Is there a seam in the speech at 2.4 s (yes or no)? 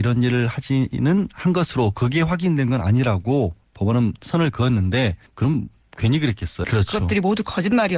no